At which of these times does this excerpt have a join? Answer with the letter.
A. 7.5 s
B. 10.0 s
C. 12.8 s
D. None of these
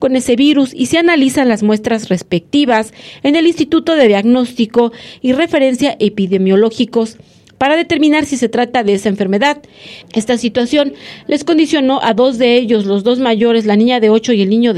B